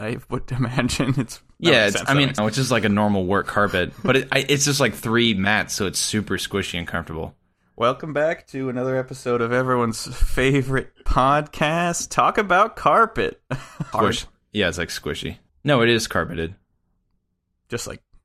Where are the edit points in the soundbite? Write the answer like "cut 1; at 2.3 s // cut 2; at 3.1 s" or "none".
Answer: cut 1; at 2.4 s // cut 2; at 13.9 s // cut 3; at 15.5 s